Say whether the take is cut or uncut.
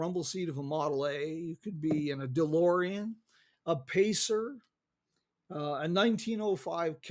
uncut